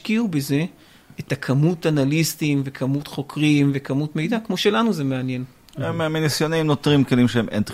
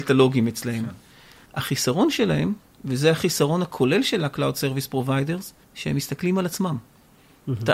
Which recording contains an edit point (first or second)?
second